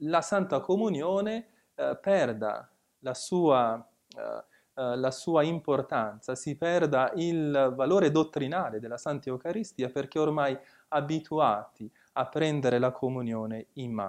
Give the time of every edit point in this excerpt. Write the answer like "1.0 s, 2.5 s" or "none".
none